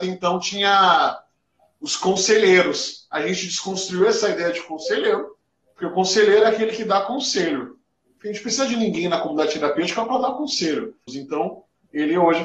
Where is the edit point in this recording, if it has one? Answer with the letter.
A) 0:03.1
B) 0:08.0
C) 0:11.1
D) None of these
C